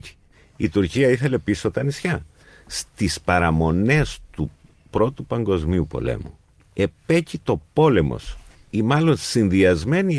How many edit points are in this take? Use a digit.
0